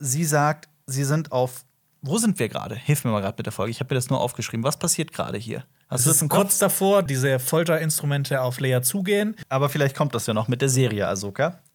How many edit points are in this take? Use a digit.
2